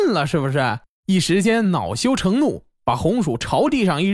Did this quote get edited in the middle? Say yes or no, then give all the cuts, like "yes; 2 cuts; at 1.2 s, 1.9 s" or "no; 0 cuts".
no; 0 cuts